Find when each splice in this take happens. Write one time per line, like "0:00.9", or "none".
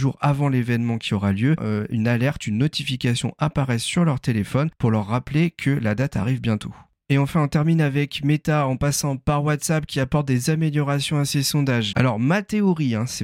0:01.6
0:11.9